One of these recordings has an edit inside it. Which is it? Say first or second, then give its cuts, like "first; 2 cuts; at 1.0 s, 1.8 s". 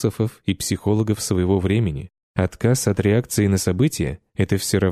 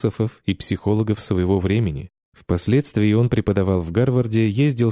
first; 1 cut; at 2.2 s